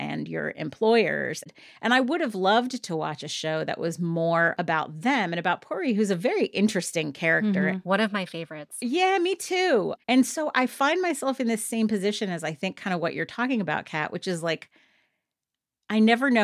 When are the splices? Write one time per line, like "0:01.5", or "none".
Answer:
0:10.0